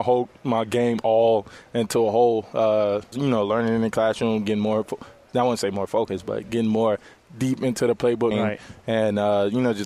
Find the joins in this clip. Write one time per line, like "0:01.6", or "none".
0:03.1
0:08.3